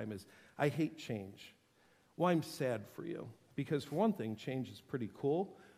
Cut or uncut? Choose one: uncut